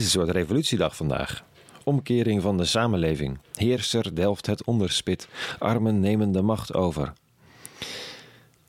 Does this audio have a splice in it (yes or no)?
no